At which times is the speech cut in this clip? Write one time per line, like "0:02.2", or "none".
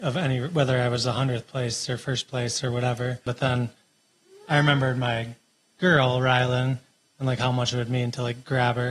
0:03.3